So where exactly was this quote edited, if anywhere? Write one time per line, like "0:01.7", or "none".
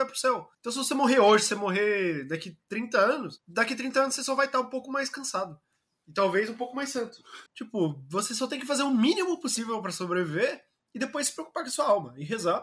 0:07.5